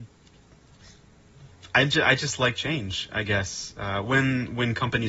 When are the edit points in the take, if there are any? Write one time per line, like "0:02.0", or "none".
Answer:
none